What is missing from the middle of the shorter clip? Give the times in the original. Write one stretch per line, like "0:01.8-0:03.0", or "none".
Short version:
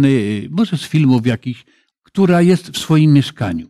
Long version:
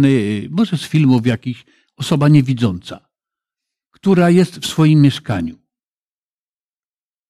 0:01.9-0:03.8